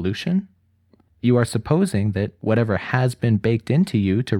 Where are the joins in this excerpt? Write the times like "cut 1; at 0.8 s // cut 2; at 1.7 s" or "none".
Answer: cut 1; at 1.1 s